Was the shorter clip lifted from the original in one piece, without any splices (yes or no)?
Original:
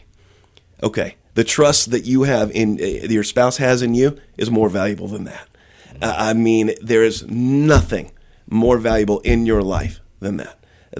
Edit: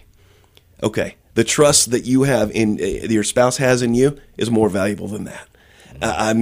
yes